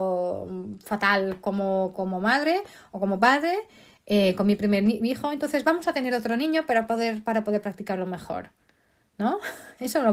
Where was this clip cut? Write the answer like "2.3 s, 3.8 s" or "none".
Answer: 2.0 s

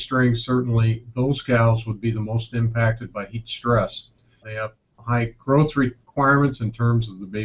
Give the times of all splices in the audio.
4.4 s

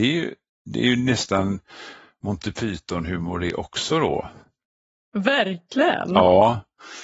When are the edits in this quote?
none

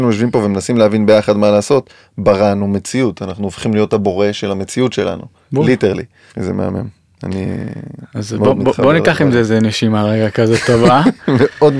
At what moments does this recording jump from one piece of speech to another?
6.3 s

